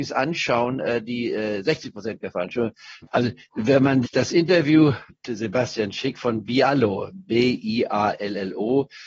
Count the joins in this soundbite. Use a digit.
0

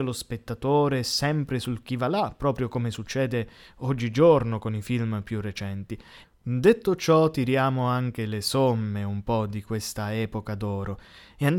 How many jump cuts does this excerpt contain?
1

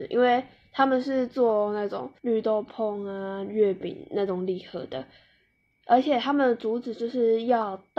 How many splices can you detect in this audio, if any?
1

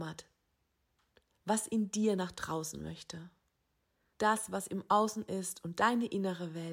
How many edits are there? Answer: 1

